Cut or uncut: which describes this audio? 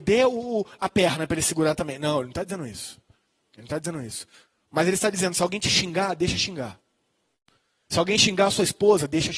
uncut